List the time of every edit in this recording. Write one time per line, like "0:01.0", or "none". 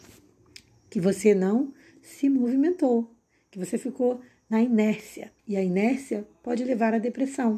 0:05.4

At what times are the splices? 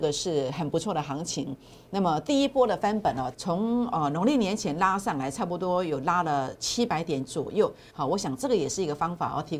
0:03.3
0:07.9

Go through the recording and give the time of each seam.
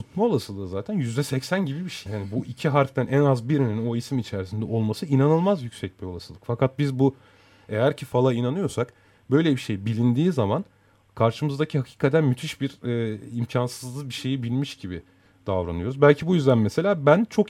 0:02.1

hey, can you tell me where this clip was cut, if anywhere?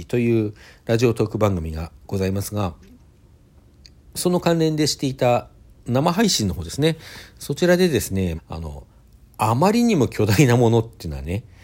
0:08.4

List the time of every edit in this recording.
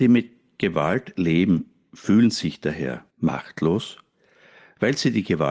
0:03.1

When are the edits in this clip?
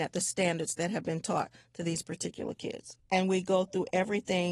0:03.0

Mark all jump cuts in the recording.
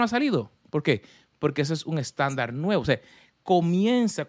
none

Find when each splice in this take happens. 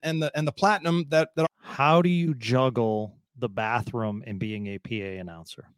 0:01.4

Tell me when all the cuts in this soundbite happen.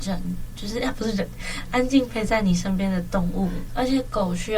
0:03.7

